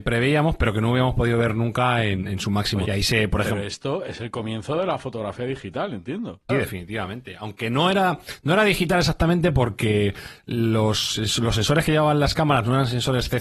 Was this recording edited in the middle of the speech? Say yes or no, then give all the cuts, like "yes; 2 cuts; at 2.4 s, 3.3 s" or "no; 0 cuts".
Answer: yes; 2 cuts; at 2.8 s, 6.5 s